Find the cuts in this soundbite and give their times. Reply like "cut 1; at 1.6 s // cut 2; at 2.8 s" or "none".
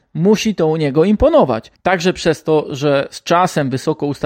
cut 1; at 1.8 s